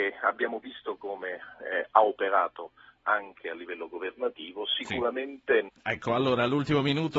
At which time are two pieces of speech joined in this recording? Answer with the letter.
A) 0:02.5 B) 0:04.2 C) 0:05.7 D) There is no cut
C